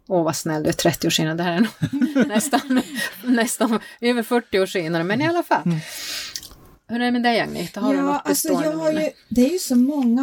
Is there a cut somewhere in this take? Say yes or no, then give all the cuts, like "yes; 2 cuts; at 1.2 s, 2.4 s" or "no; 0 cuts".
no; 0 cuts